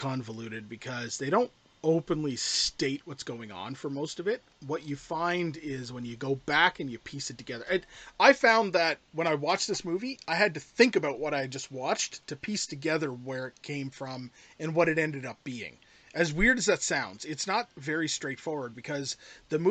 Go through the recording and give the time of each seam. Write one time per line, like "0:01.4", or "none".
none